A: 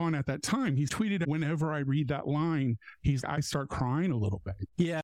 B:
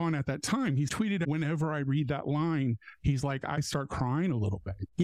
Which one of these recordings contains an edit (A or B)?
A